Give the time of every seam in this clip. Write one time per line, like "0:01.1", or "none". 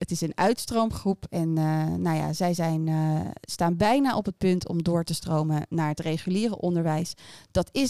none

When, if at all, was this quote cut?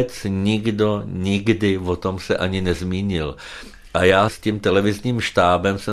none

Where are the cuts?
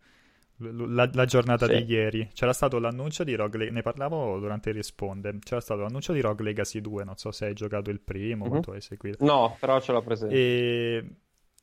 none

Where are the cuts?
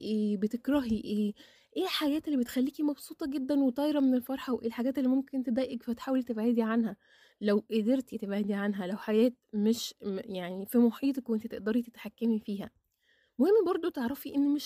none

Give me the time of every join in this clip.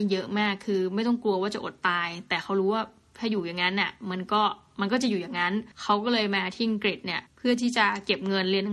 0:05.7
0:07.3

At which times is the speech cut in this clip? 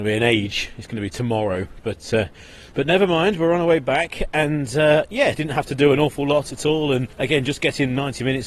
0:05.3
0:07.1

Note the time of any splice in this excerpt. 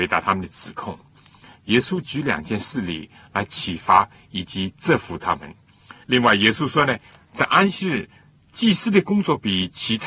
0:06.0

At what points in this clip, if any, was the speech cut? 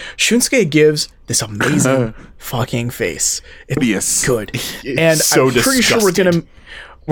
0:03.8

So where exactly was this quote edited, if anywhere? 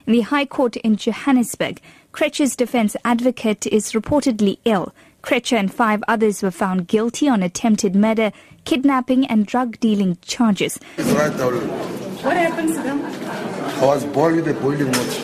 0:11.0
0:12.2

